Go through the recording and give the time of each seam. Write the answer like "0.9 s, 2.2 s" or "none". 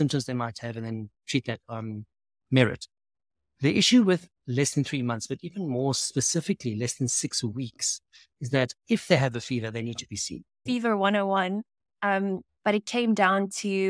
10.7 s, 12.5 s